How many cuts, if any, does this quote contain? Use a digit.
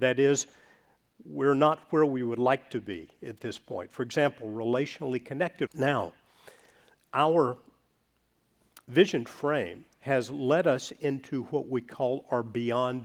2